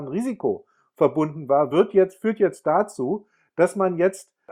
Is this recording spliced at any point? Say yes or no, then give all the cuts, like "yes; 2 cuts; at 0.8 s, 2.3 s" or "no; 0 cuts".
no; 0 cuts